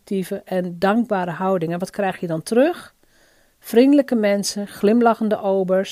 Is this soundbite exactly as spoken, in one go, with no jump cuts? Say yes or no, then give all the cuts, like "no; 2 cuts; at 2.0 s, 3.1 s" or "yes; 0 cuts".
yes; 0 cuts